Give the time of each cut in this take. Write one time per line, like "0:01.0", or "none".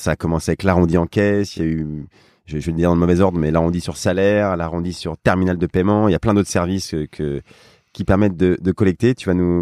none